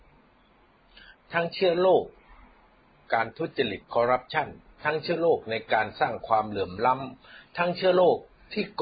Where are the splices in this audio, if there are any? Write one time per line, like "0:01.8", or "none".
none

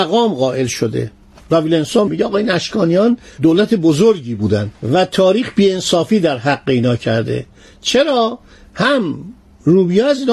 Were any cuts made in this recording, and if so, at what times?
0:02.1

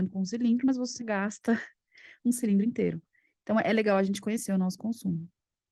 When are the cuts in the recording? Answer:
0:01.0

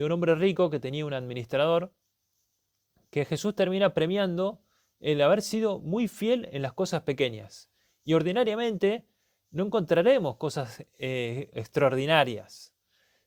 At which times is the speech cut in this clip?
0:11.5

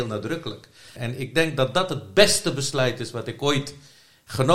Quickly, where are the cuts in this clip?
0:00.9

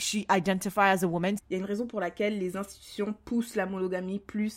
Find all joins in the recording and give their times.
0:01.4

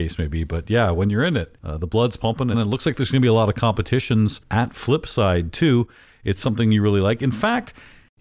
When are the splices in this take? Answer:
0:02.5

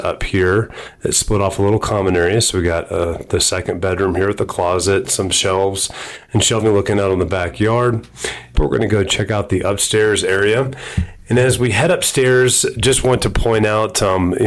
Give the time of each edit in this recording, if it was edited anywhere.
0:08.5

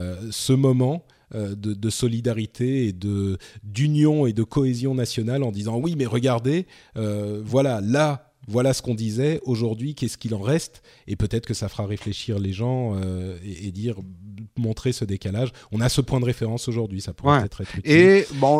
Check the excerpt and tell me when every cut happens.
none

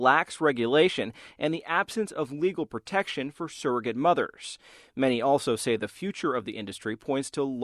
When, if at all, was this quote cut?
none

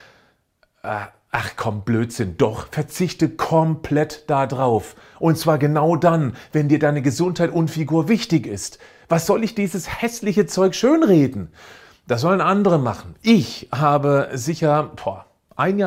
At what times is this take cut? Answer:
none

